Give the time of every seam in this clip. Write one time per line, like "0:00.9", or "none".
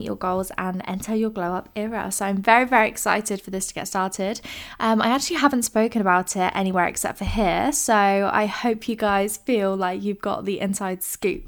none